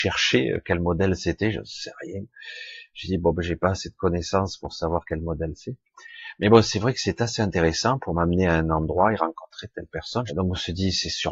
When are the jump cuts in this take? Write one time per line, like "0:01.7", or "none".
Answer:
0:10.3